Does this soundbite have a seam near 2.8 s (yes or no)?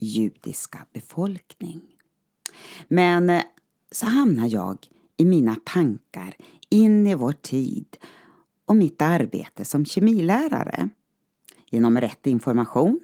no